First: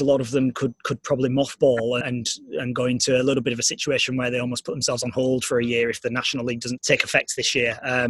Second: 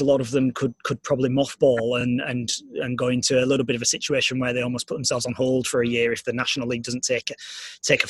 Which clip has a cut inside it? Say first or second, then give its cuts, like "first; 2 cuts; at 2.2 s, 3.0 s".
first; 2 cuts; at 2.0 s, 6.8 s